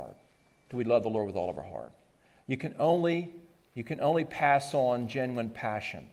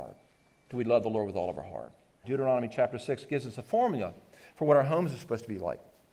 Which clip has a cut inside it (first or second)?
second